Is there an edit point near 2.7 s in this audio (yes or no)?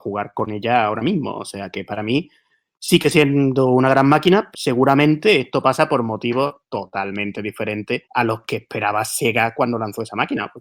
no